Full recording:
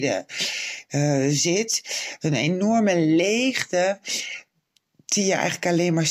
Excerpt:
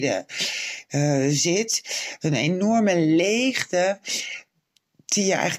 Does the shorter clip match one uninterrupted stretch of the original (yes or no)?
yes